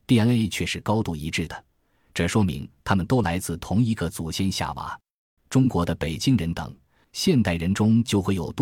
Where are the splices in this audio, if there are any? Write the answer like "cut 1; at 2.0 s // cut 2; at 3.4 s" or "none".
cut 1; at 5.4 s // cut 2; at 7.0 s